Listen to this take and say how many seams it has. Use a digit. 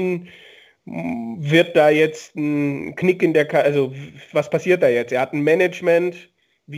1